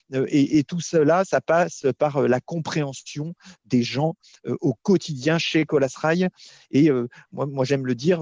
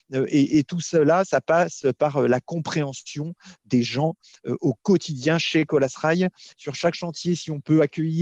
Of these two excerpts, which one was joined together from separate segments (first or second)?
second